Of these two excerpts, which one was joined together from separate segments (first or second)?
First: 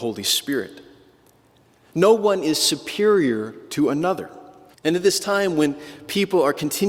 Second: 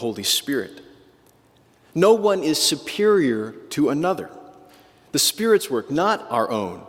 first